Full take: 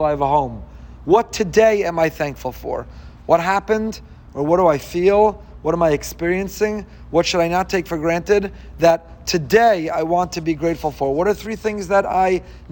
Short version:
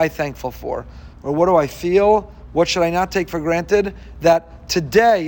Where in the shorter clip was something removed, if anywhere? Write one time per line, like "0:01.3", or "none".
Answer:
0:01.1
0:02.5